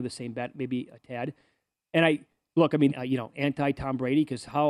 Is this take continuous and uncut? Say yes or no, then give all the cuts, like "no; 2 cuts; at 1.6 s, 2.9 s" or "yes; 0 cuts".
no; 1 cut; at 2.9 s